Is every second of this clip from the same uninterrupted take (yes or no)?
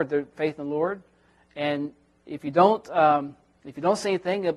yes